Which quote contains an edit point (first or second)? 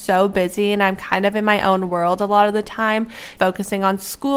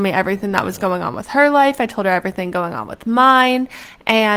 first